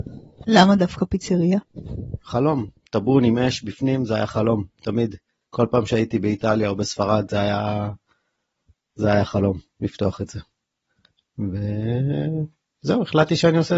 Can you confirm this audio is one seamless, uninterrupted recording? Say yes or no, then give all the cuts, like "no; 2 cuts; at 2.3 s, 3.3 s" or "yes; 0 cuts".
yes; 0 cuts